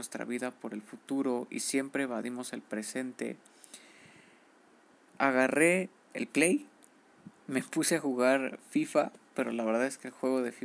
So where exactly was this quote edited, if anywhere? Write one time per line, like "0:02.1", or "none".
0:05.1
0:09.3